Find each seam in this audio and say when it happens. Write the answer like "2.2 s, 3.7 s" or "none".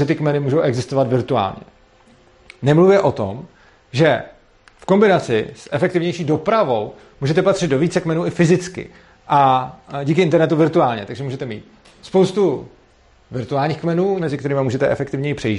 14.2 s